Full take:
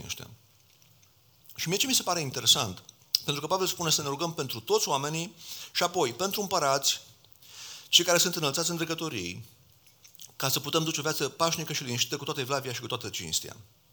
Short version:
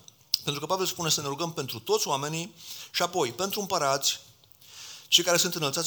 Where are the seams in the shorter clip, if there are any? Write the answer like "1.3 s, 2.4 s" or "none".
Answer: none